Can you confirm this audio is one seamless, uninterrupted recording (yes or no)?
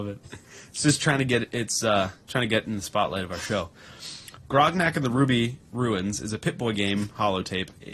no